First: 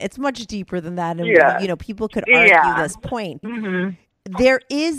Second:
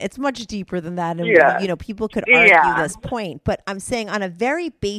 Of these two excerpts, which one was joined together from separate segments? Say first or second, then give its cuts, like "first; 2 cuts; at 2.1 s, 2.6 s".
first; 1 cut; at 3.4 s